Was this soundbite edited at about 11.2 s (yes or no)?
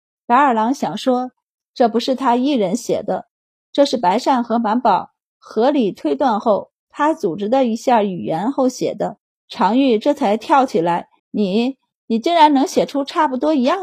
yes